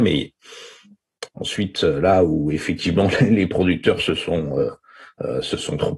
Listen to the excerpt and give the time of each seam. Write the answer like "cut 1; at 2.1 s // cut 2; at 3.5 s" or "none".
cut 1; at 1.3 s